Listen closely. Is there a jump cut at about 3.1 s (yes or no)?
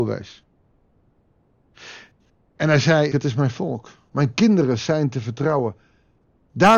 yes